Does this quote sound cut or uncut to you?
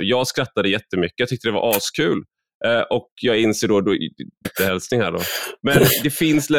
cut